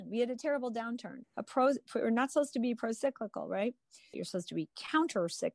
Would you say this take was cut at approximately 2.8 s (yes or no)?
no